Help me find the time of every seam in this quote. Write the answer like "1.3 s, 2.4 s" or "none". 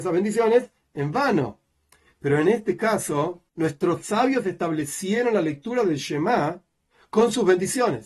3.5 s